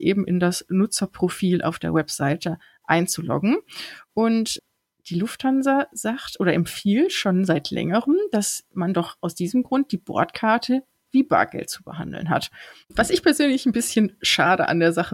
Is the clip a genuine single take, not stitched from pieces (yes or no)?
no